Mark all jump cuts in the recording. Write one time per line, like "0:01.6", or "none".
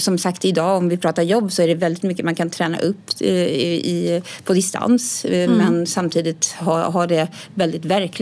none